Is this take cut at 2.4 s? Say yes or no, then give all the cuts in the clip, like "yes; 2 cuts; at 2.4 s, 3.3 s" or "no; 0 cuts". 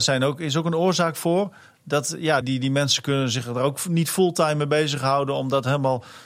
yes; 1 cut; at 2.4 s